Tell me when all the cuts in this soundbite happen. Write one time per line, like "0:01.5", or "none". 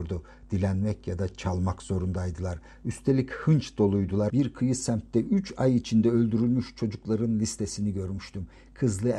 0:04.3